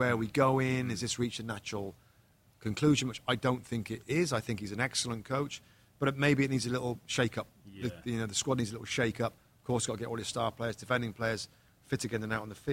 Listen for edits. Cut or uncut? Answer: uncut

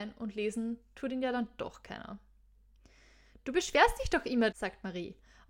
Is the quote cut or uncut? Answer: cut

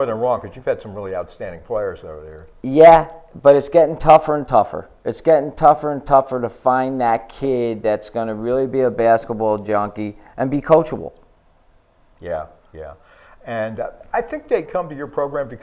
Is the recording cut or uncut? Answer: cut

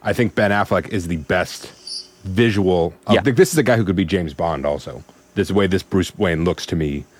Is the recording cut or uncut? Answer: cut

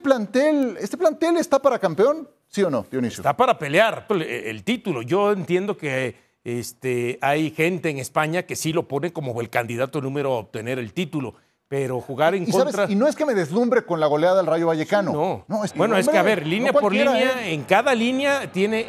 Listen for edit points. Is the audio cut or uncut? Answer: cut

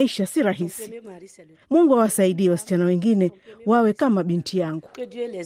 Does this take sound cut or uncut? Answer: cut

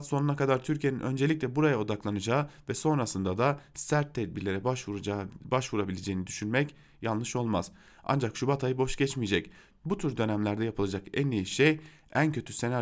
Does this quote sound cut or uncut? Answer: cut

